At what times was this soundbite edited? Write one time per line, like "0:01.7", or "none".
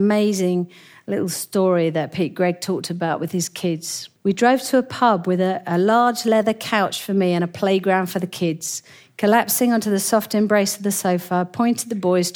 0:04.2